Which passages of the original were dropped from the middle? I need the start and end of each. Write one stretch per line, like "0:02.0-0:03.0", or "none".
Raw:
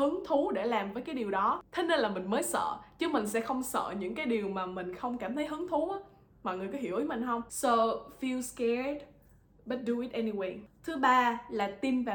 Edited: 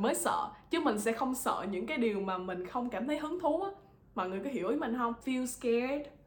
0:07.5-0:08.2